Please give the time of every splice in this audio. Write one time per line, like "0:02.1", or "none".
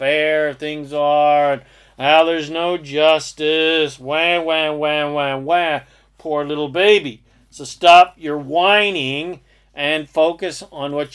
none